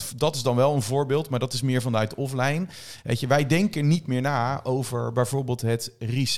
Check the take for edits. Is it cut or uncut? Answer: uncut